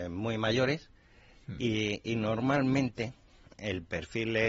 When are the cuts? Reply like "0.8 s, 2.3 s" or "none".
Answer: none

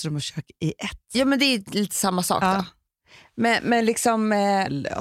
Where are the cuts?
none

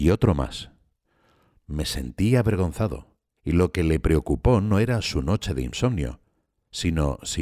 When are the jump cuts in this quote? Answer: 1.6 s, 3.4 s

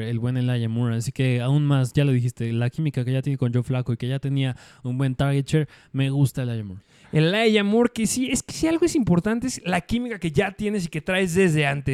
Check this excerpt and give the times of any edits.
7.0 s

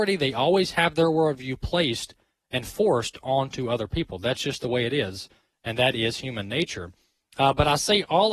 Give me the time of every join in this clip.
none

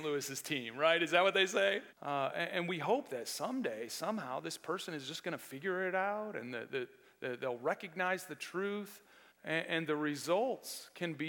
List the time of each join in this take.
1.9 s, 9.3 s

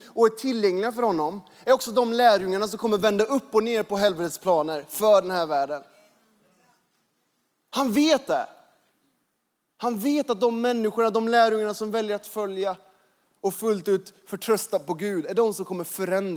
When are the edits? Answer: none

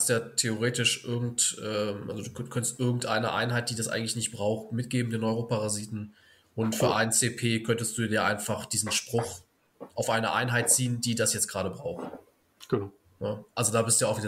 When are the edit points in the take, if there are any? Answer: none

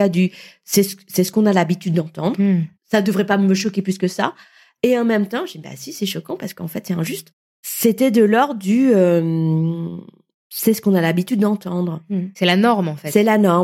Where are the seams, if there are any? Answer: none

